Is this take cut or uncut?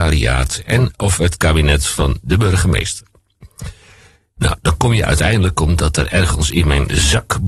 uncut